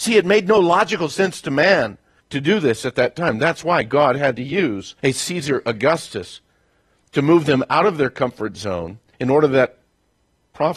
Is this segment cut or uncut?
uncut